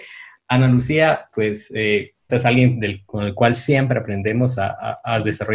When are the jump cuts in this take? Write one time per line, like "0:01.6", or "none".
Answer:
0:02.3